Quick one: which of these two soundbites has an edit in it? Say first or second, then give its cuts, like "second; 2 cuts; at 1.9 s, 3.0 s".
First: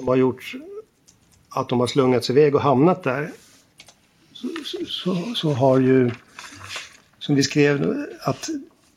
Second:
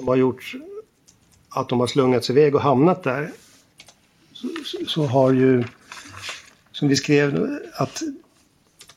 second; 1 cut; at 4.9 s